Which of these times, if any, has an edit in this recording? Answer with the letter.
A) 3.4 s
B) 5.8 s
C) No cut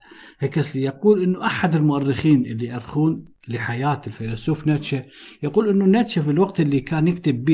A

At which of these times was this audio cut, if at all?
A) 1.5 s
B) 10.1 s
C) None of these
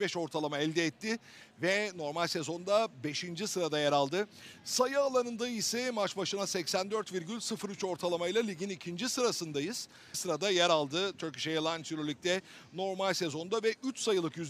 B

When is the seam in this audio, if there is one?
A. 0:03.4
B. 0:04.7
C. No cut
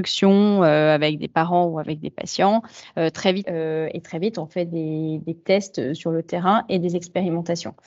A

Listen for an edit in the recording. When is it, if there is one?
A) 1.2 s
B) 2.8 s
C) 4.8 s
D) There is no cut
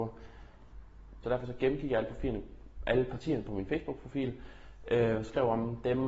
A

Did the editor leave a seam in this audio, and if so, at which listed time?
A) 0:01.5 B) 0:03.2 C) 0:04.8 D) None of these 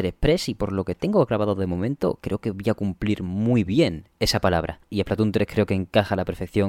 C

